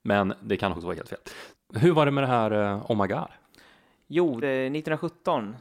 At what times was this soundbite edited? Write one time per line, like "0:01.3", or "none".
0:01.5
0:04.4